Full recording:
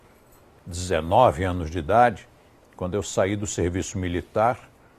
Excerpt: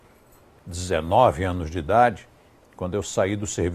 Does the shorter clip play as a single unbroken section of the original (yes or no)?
yes